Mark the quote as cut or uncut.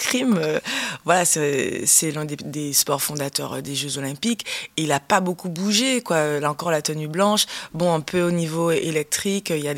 uncut